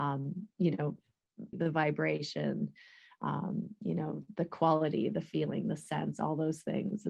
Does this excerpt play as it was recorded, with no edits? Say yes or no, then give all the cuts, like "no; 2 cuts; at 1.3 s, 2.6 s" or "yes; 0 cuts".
no; 1 cut; at 1.5 s